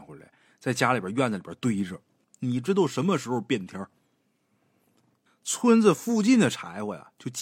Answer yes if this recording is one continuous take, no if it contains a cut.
no